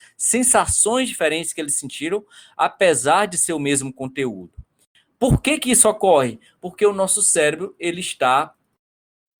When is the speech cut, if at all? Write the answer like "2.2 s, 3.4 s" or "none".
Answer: none